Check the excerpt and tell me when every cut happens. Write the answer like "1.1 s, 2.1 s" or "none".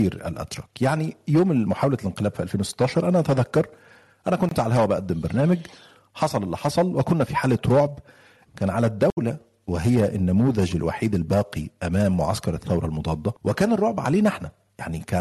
8.5 s, 13.4 s